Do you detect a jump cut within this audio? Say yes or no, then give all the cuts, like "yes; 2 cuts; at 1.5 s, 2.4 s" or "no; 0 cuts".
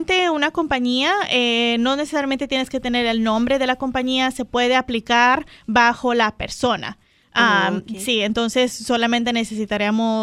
no; 0 cuts